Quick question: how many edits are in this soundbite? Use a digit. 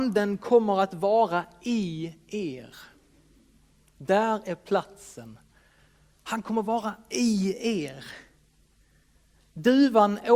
0